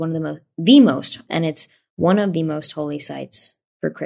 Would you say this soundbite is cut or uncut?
cut